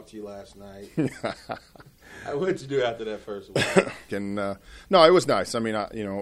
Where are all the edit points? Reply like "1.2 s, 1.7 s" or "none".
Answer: 4.1 s